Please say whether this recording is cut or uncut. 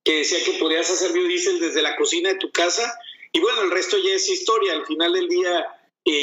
uncut